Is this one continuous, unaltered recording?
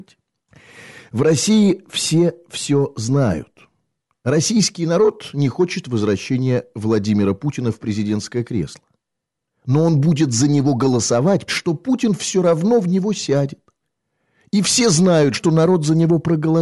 no; 2 cuts; at 11.5 s, 15.3 s

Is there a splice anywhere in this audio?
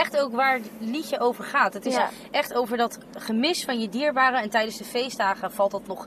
no; 0 cuts

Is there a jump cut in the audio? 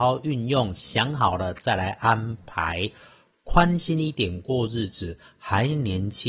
no; 0 cuts

